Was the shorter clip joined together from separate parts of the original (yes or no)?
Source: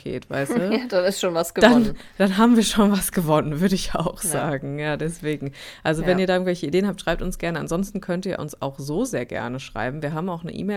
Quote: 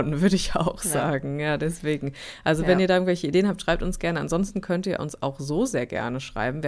no